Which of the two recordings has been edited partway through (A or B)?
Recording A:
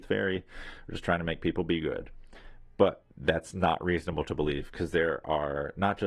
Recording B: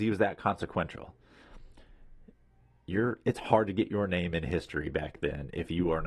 A